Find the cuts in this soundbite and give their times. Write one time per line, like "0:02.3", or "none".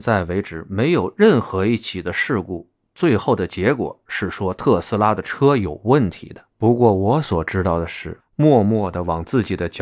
0:06.5
0:08.2

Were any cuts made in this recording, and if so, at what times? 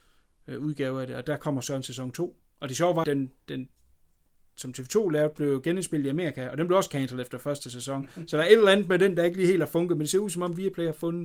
0:03.0

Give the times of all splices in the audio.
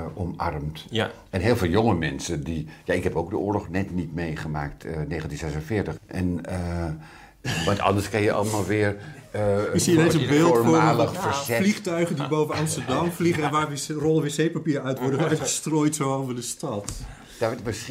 0:06.0
0:07.4

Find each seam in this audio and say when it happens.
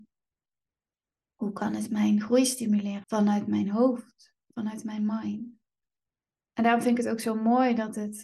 0:03.0

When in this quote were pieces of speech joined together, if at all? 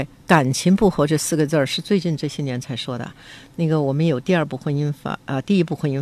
none

